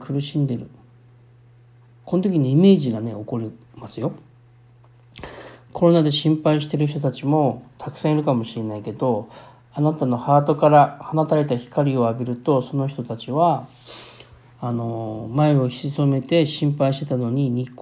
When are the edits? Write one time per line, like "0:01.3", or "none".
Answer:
none